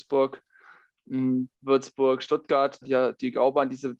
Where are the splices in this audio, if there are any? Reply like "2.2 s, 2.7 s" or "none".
1.5 s, 2.8 s